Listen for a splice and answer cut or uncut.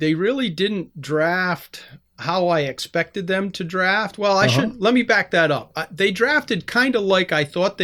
uncut